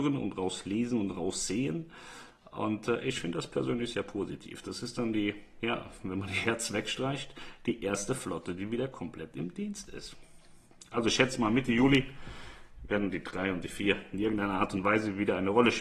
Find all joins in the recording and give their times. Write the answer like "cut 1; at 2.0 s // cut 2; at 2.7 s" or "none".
none

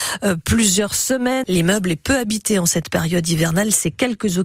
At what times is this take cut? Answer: cut 1; at 1.4 s

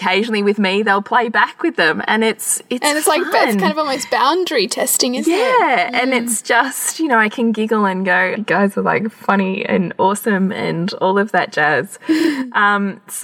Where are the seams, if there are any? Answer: cut 1; at 8.4 s

